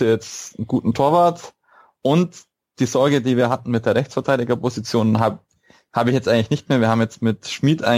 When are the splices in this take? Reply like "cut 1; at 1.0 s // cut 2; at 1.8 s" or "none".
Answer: none